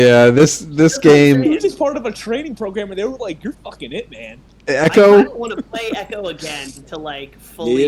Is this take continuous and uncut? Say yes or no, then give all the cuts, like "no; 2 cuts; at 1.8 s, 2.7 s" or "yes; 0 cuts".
yes; 0 cuts